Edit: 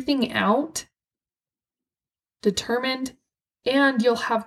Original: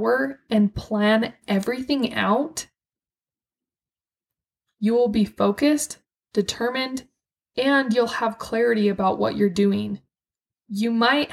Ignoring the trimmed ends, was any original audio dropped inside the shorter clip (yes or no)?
yes